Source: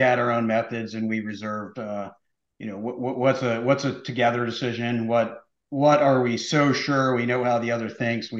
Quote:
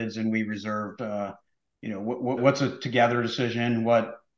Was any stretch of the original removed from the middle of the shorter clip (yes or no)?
yes